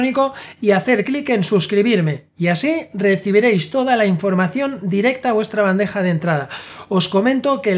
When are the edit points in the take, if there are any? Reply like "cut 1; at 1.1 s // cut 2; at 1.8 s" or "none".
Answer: none

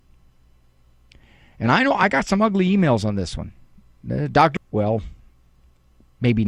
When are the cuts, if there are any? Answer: cut 1; at 4.6 s

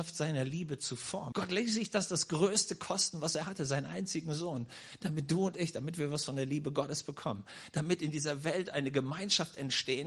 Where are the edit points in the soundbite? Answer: cut 1; at 1.3 s

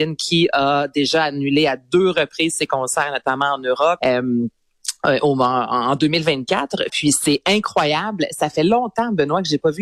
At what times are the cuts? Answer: cut 1; at 4.0 s // cut 2; at 6.9 s

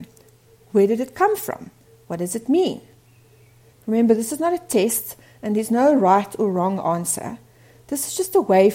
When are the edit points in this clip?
cut 1; at 3.7 s

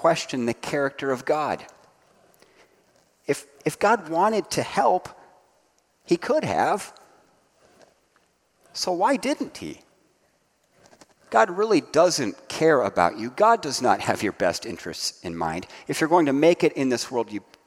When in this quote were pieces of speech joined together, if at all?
cut 1; at 11.3 s

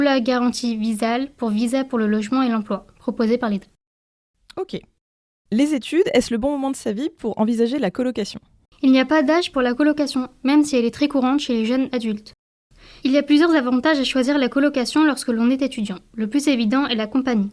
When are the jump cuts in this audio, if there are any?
none

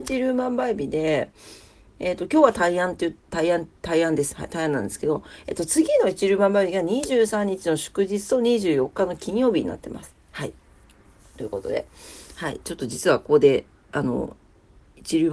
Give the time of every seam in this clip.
none

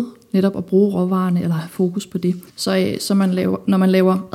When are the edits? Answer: cut 1; at 2.5 s

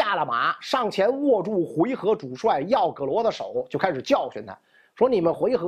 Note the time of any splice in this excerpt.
none

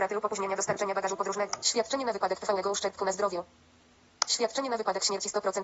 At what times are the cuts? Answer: cut 1; at 1.6 s

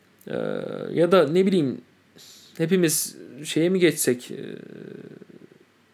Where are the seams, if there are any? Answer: none

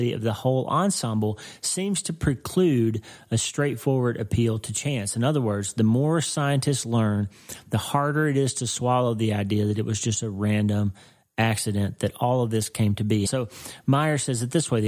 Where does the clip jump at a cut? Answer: cut 1; at 13.3 s

